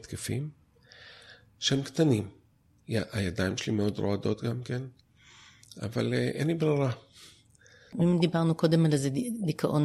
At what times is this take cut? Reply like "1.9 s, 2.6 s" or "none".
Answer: 2.8 s

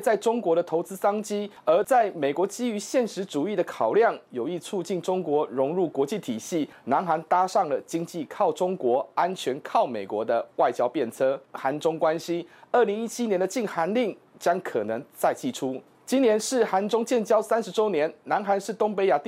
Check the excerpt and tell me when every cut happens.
11.4 s

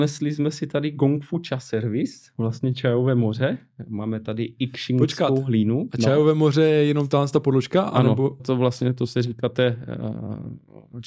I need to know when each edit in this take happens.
8.4 s

